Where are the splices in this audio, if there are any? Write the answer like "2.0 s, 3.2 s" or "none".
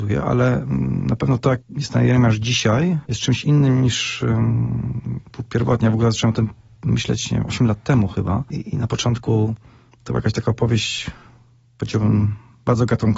none